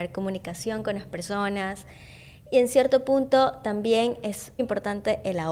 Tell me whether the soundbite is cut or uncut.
cut